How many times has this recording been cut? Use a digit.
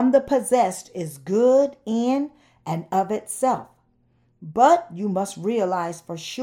0